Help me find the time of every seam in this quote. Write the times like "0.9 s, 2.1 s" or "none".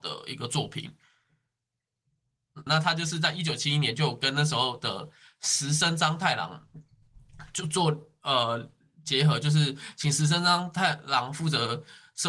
2.7 s